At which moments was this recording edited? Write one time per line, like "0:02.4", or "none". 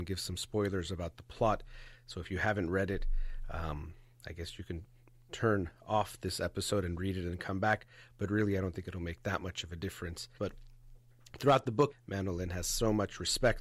0:10.4
0:11.9